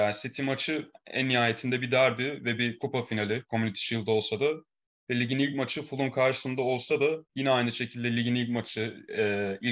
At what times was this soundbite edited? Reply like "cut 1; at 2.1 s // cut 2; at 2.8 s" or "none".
cut 1; at 7.3 s